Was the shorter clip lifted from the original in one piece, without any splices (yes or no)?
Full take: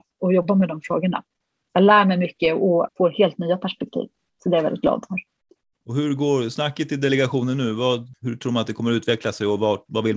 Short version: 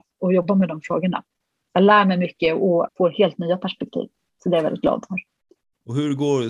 yes